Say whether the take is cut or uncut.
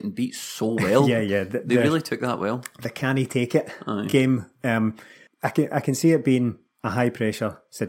uncut